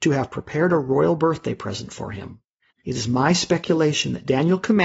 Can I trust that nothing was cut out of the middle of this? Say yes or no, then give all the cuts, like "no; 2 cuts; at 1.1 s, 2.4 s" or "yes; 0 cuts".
no; 1 cut; at 2.7 s